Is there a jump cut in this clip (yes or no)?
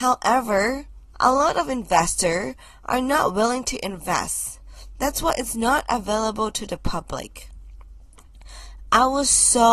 yes